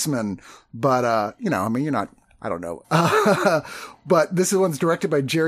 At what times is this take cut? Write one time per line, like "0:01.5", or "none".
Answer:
0:02.8